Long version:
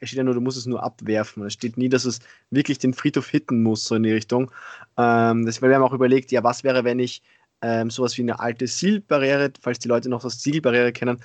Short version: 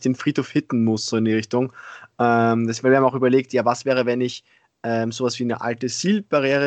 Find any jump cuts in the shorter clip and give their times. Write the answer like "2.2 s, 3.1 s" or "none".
none